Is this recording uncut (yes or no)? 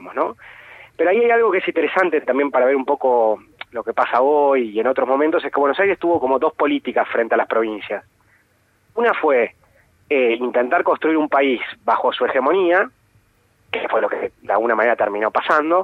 yes